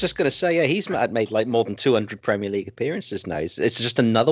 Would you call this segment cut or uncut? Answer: uncut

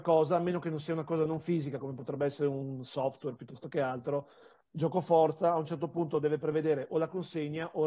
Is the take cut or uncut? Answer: uncut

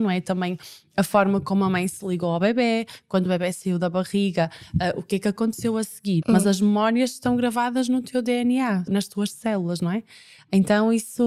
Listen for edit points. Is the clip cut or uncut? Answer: cut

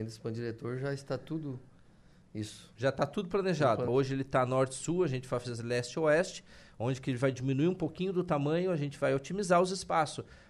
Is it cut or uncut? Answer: cut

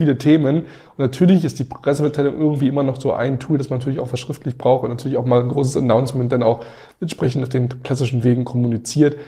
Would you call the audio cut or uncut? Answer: uncut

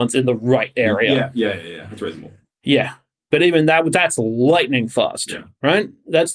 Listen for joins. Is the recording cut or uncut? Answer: uncut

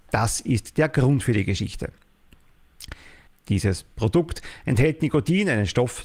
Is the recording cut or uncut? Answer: cut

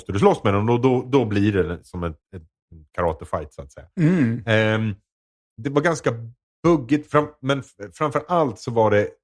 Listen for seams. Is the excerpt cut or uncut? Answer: uncut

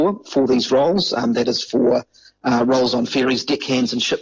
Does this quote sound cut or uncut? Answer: uncut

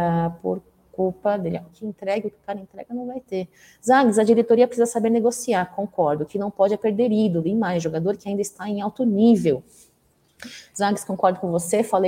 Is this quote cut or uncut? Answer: cut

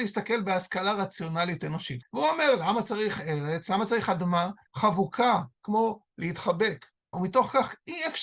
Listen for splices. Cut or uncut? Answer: cut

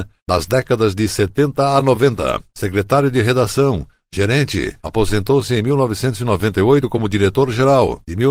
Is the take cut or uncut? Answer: uncut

